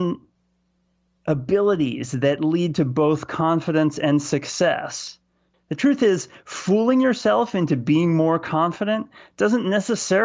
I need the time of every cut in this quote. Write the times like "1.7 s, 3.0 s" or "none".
5.5 s

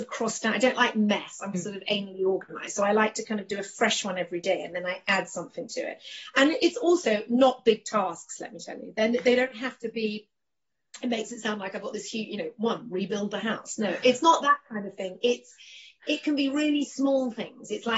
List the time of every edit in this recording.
1.5 s

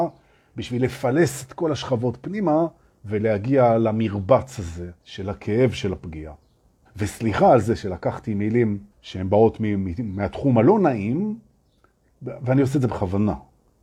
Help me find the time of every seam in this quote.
5.0 s, 6.9 s, 8.9 s

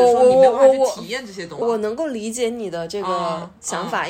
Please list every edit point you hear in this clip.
1.6 s

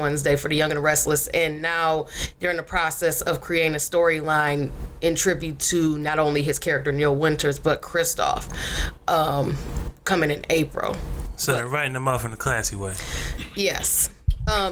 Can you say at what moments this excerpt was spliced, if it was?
none

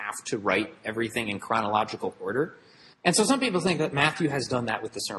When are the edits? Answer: 2.9 s

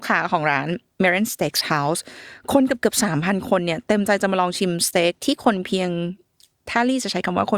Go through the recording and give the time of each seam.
none

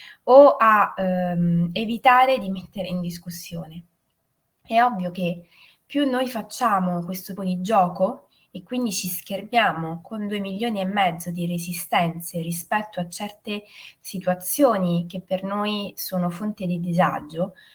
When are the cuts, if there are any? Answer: 7.4 s

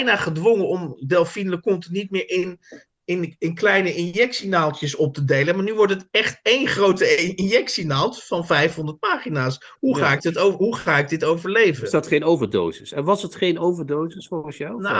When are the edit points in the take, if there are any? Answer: none

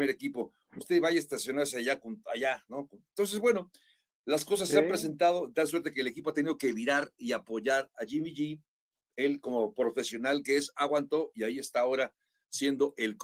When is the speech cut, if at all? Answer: none

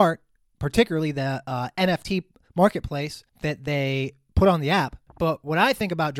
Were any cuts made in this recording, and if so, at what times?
none

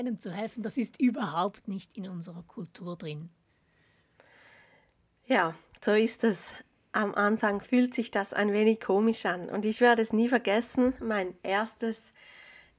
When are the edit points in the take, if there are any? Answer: none

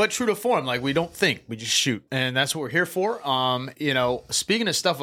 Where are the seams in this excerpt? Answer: 2.1 s, 3.7 s

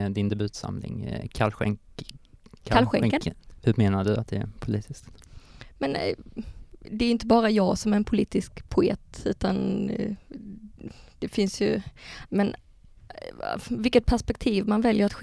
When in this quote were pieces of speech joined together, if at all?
3.6 s, 12.3 s

